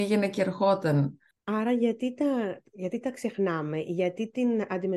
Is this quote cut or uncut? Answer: cut